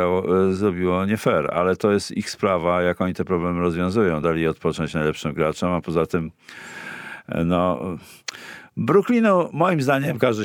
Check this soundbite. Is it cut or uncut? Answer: uncut